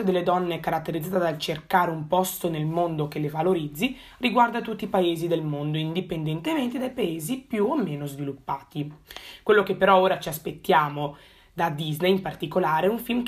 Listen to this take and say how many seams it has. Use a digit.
0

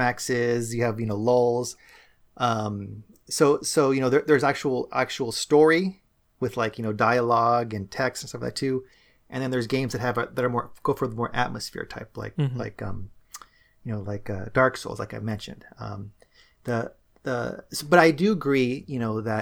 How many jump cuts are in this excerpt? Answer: 0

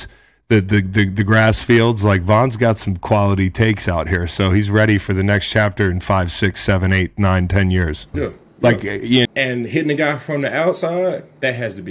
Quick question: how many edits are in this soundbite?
2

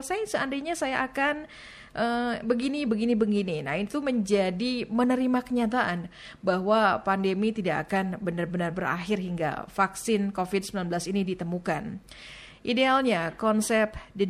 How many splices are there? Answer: 2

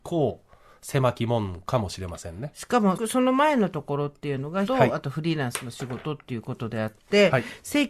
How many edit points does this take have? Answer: 2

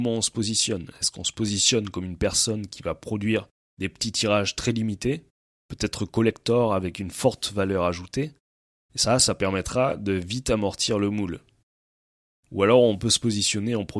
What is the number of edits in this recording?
0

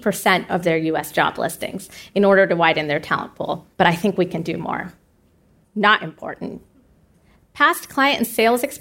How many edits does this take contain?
2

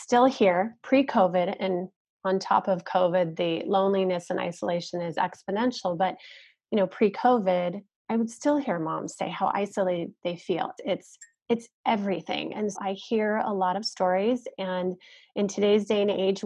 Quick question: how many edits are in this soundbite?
2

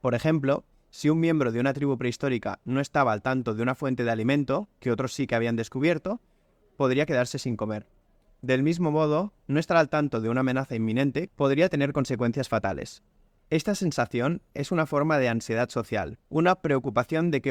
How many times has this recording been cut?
3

